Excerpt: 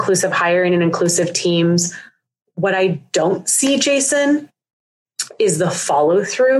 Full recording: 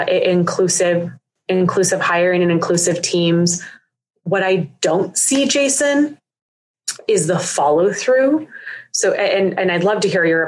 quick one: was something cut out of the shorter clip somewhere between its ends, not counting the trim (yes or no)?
no